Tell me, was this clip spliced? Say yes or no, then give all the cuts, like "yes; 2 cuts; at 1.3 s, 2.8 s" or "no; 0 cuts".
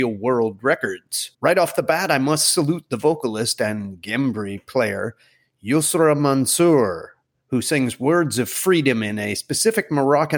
yes; 1 cut; at 1.3 s